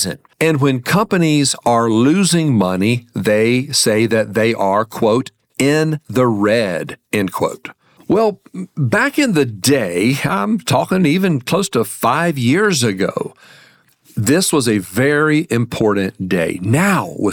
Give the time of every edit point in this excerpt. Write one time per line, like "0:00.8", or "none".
0:08.0